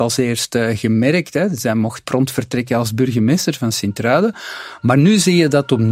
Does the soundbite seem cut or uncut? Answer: cut